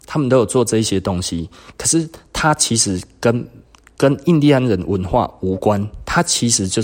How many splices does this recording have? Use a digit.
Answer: 0